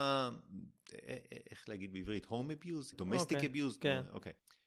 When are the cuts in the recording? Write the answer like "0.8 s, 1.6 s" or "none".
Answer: 2.9 s